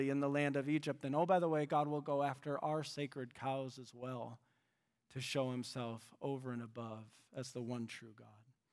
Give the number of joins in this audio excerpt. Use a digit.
0